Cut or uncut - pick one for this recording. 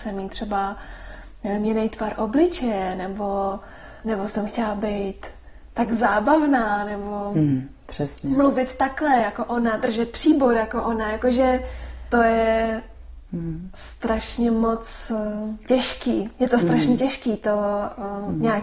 uncut